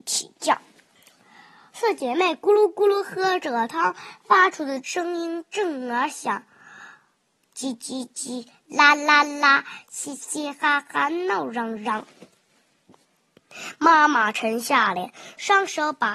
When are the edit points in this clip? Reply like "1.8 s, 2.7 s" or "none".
7.4 s